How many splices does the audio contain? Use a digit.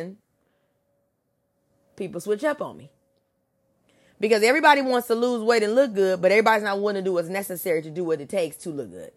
0